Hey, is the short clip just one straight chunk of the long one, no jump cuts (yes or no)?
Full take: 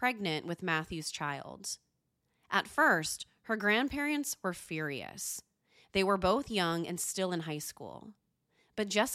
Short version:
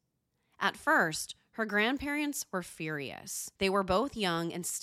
no